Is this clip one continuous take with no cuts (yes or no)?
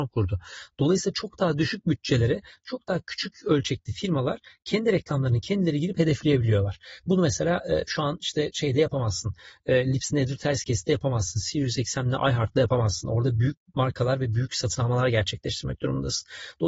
yes